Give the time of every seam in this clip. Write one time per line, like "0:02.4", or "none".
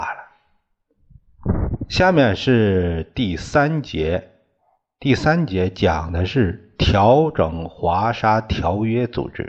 none

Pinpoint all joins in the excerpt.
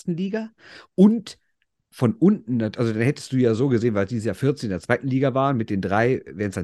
none

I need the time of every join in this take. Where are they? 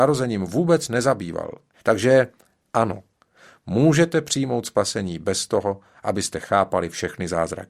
0:01.7

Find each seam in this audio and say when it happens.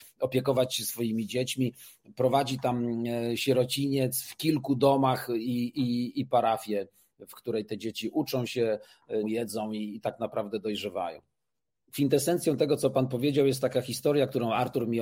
0:09.2

